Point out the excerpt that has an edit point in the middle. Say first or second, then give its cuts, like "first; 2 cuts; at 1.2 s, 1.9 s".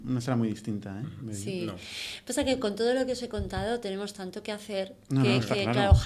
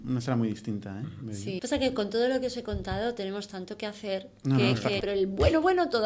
second; 2 cuts; at 1.6 s, 5.0 s